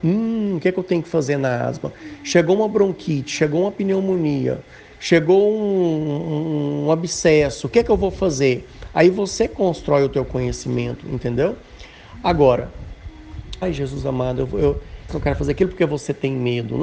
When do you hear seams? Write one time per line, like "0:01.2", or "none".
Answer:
0:13.6
0:15.1